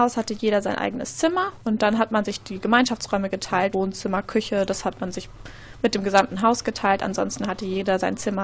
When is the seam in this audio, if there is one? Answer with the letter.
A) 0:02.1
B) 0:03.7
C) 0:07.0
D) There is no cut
B